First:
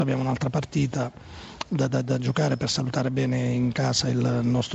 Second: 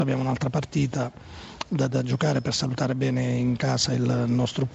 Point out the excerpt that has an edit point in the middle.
second; 1 cut; at 1.9 s

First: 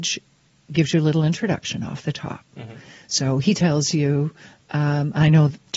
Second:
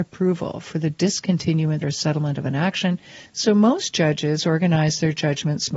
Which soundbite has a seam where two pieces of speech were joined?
second; 2 cuts; at 1.8 s, 3.3 s

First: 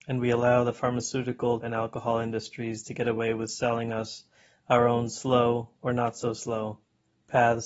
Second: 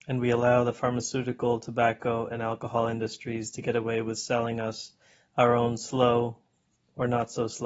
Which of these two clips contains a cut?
first; 2 cuts; at 1.6 s, 5.7 s

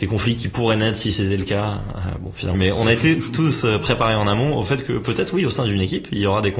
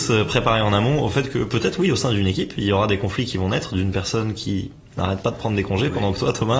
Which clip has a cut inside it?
first; 1 cut; at 2.5 s

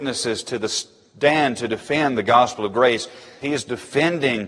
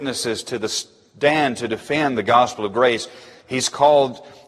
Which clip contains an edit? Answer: first; 1 cut; at 3.4 s

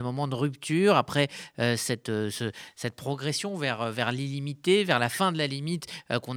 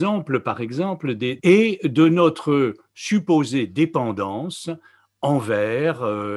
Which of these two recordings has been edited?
second; 1 cut; at 1.4 s

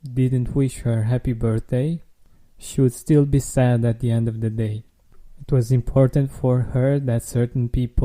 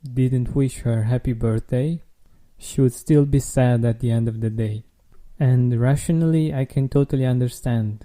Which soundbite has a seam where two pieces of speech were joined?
first; 1 cut; at 5.4 s

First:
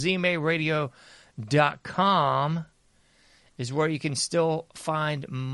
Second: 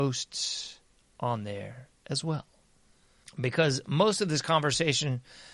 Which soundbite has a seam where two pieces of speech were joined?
second; 1 cut; at 3.2 s

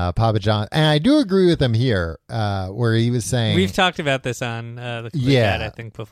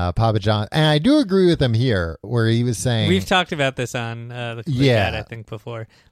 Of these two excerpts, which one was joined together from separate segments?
second; 1 cut; at 2.2 s

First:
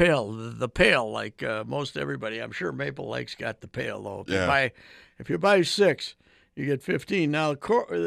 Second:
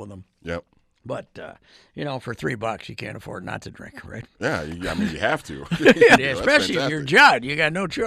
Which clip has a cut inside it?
second; 1 cut; at 6.2 s

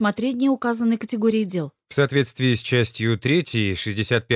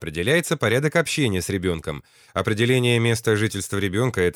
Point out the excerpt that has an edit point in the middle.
second; 1 cut; at 2.3 s

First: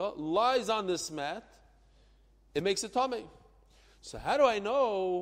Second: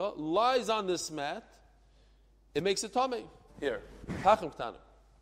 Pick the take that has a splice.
second; 1 cut; at 3.5 s

